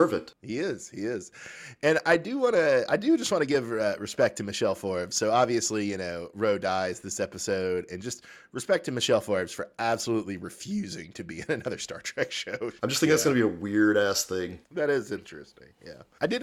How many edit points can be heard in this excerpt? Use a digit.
1